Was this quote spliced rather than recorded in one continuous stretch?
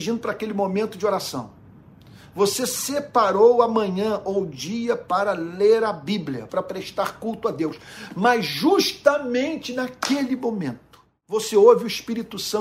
yes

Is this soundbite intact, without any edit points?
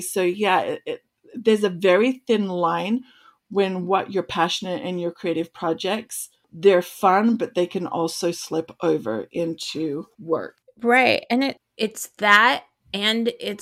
yes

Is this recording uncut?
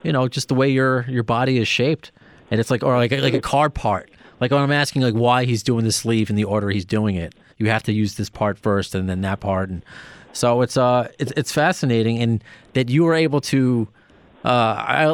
no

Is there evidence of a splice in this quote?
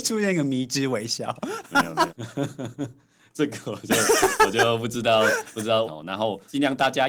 yes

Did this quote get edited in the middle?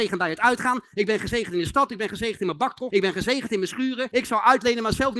yes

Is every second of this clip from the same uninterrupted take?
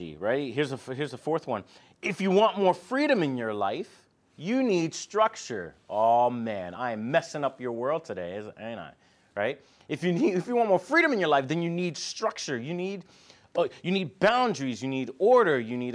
yes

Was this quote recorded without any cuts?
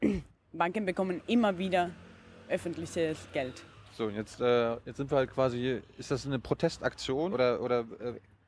no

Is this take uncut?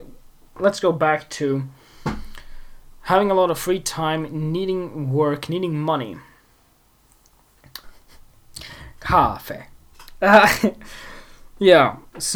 no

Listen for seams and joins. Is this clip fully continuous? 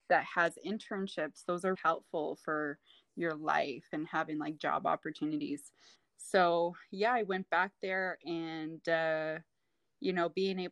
no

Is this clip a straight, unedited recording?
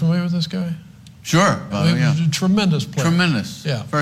no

